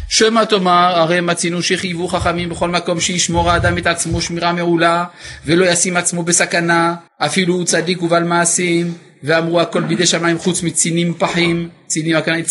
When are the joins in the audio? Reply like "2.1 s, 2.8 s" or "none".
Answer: 7.1 s